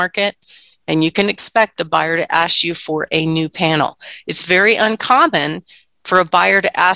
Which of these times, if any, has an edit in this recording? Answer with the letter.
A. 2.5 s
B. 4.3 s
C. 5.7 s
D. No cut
D